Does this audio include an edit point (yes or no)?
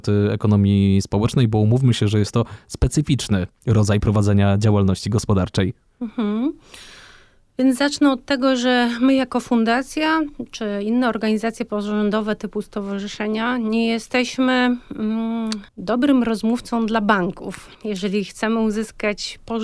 yes